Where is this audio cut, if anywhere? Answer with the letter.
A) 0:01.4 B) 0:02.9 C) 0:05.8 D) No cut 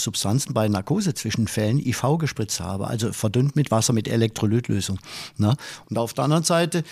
C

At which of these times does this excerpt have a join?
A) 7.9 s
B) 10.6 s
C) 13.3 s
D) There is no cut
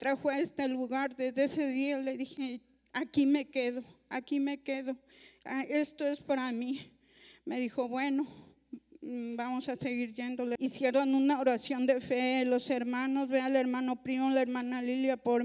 B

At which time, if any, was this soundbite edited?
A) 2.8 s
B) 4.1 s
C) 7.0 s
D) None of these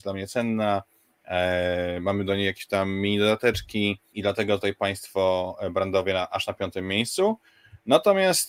B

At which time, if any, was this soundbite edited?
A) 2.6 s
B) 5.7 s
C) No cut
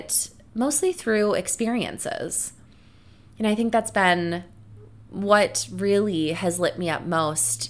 C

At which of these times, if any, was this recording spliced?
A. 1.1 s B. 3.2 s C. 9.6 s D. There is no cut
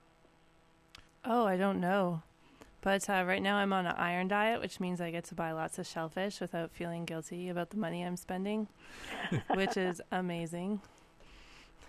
A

